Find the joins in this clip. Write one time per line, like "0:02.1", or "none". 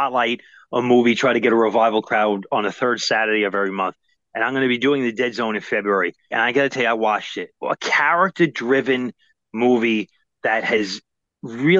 0:06.3
0:07.6